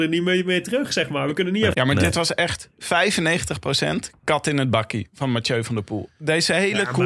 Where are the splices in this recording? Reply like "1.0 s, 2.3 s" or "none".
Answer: 1.7 s

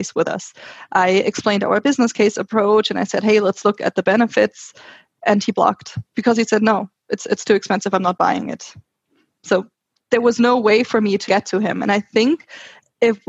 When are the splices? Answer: 11.3 s

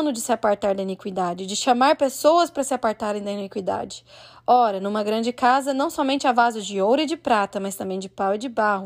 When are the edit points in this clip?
none

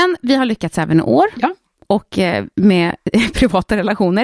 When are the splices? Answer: none

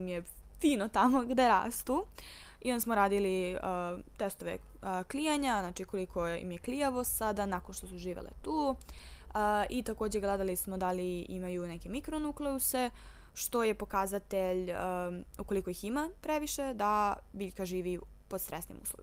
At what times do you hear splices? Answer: none

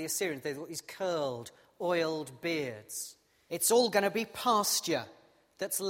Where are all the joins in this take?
3.5 s

